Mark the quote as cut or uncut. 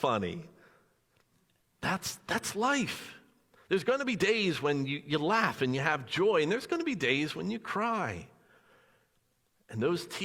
uncut